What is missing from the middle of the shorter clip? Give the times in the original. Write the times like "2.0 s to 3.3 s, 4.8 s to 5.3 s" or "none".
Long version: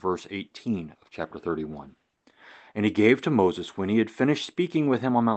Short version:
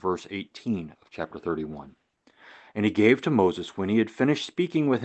none